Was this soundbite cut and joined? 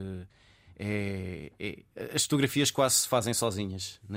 no; 0 cuts

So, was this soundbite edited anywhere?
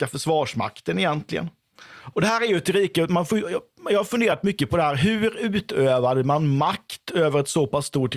yes; 1 cut; at 2.1 s

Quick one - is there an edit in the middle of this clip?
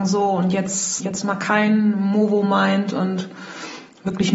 yes; 1 cut; at 1.0 s

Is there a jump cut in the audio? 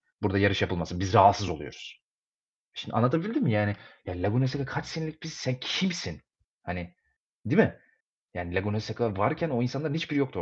no; 0 cuts

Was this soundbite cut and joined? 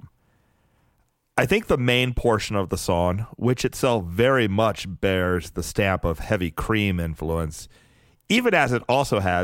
no; 0 cuts

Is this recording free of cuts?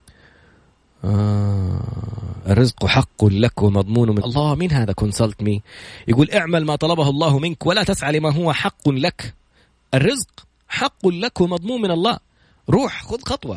no; 1 cut; at 4.2 s

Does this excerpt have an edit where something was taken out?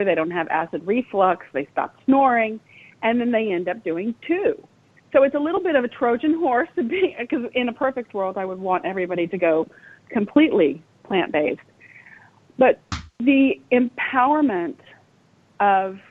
no; 0 cuts

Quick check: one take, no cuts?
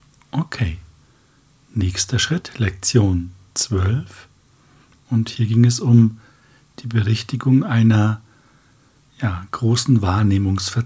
no; 1 cut; at 5.0 s

